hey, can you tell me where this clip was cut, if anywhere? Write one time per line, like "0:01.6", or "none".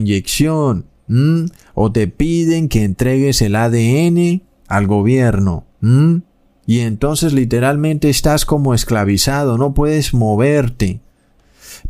none